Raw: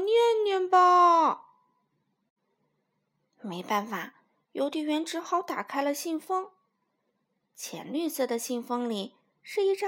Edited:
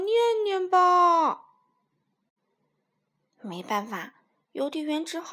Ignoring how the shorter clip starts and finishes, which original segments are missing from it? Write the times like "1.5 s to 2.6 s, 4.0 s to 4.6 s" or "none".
none